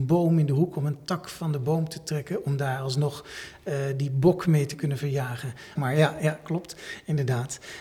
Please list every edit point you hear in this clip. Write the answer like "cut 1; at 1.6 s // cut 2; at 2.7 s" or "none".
cut 1; at 5.8 s